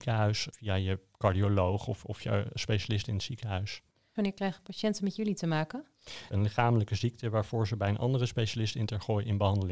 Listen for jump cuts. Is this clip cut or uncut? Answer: cut